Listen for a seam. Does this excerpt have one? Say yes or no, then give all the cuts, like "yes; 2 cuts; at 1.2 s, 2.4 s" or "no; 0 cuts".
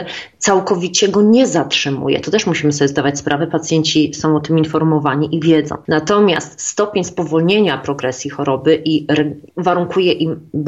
yes; 1 cut; at 9.5 s